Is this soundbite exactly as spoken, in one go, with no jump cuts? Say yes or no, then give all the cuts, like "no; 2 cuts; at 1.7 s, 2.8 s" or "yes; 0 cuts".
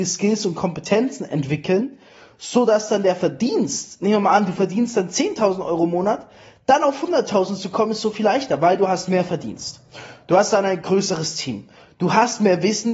yes; 0 cuts